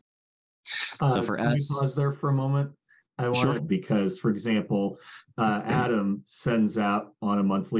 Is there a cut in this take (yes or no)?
yes